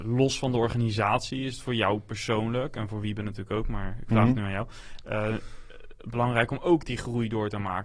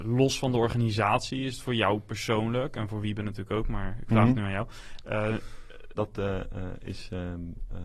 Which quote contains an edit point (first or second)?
second